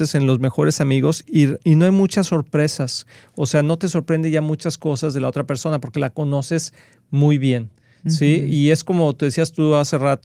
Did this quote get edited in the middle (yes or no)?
no